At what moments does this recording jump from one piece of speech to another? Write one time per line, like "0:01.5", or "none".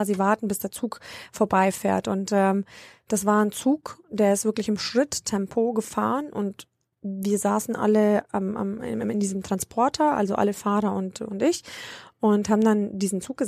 none